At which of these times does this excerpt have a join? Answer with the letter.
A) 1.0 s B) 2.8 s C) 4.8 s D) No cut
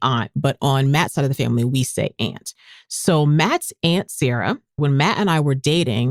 C